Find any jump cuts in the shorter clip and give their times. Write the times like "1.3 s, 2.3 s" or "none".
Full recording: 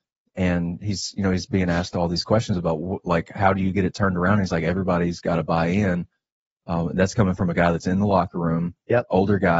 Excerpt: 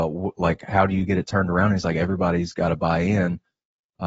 none